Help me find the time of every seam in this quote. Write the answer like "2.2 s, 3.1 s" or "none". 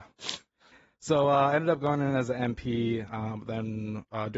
none